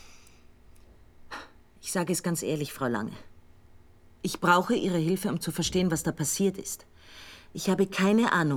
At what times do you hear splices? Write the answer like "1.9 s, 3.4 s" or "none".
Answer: none